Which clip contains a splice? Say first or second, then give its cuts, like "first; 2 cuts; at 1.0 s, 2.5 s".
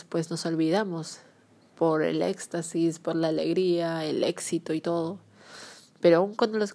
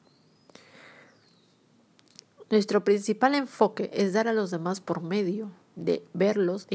second; 1 cut; at 5.6 s